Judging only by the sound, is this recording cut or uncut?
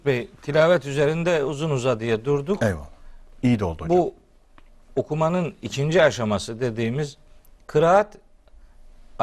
uncut